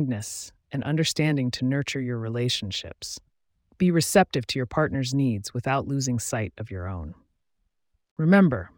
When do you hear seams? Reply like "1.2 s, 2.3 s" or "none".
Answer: none

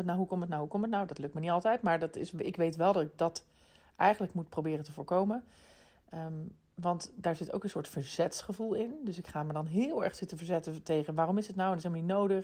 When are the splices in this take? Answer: none

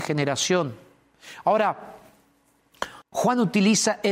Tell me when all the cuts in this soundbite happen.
3.0 s

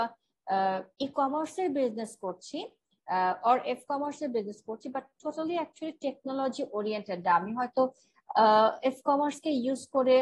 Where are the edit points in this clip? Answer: 0.9 s

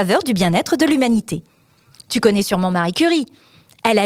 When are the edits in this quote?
2.0 s

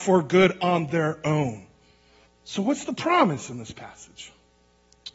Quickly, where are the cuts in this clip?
2.3 s

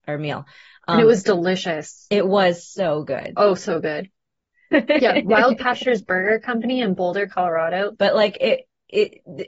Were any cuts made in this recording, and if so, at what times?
4.7 s, 8.0 s

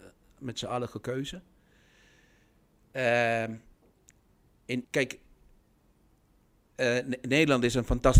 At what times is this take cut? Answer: 4.8 s

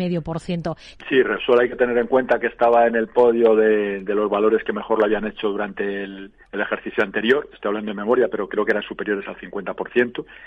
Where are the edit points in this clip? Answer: 1.0 s, 6.4 s, 7.5 s

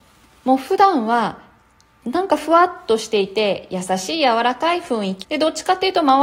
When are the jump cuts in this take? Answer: 5.2 s

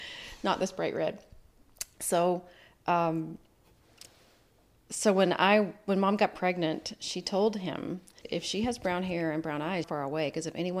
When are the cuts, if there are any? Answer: 8.2 s, 9.8 s

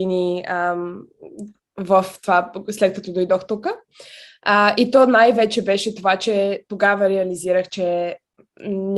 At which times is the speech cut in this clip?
none

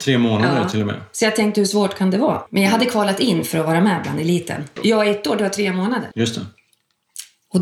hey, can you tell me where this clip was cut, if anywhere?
2.5 s, 4.8 s, 6.1 s

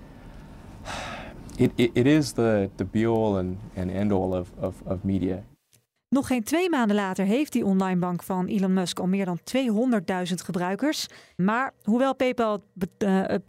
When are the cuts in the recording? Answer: 6.0 s, 11.4 s

